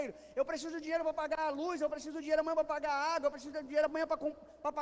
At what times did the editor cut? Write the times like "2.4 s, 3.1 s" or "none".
none

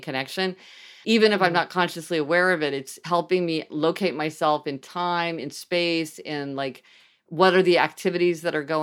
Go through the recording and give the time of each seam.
1.0 s

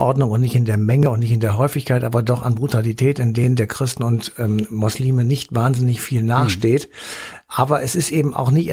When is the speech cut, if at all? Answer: none

